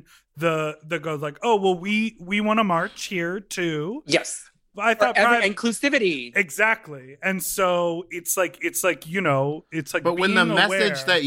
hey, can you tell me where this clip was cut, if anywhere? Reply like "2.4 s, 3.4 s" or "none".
4.7 s